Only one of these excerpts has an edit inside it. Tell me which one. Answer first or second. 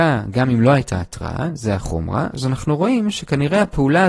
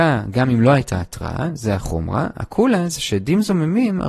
first